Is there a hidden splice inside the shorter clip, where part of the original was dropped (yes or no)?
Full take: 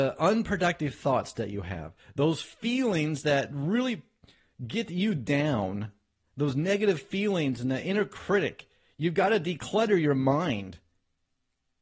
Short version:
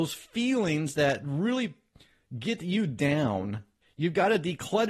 yes